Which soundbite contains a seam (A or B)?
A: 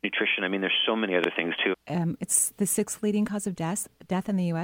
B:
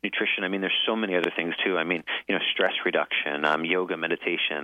A